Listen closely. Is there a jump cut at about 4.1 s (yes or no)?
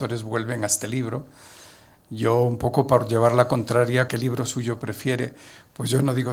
yes